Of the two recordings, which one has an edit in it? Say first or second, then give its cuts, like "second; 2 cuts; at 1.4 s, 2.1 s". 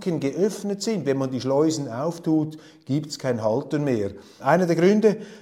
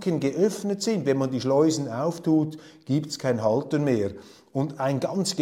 first; 1 cut; at 4.4 s